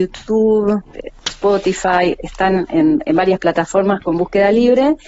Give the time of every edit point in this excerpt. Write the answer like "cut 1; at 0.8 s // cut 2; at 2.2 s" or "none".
none